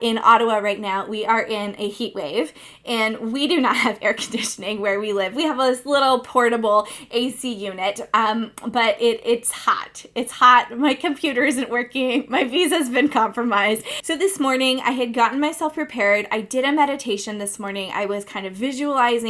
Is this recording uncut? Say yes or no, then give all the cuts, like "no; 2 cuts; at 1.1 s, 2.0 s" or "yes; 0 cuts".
no; 1 cut; at 14.0 s